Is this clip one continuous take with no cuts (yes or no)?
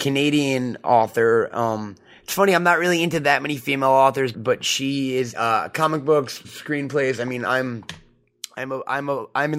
no